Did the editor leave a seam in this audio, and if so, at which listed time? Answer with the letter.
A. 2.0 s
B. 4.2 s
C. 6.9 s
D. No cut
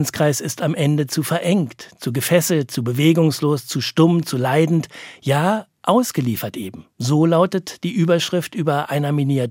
C